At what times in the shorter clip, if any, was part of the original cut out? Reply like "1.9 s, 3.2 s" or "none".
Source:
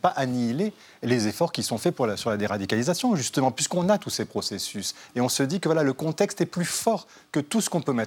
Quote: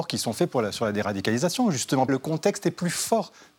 2.1 s